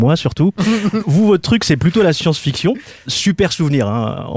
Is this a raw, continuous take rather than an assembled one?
no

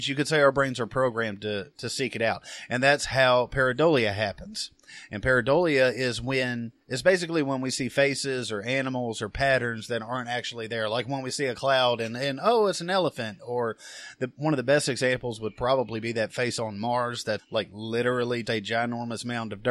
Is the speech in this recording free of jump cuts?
no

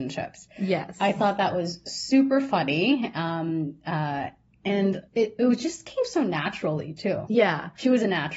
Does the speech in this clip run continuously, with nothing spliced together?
no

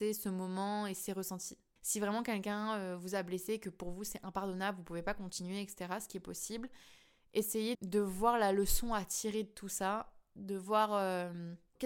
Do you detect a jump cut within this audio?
yes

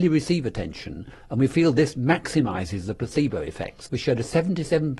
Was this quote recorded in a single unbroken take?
no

